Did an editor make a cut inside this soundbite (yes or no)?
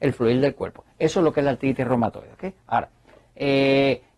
no